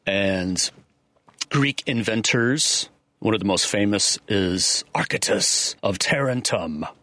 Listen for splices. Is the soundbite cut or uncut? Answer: cut